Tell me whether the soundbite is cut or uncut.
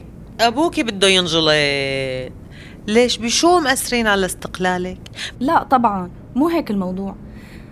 cut